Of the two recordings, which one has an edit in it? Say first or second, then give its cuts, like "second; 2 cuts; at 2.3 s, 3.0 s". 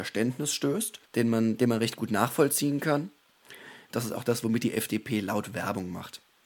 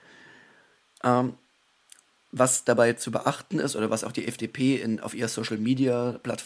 first; 2 cuts; at 1.1 s, 3.9 s